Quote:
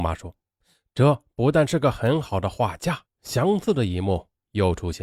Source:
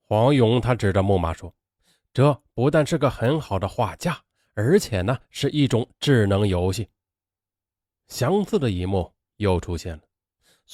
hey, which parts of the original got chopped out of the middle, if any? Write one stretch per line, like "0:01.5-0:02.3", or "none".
0:04.2-0:07.9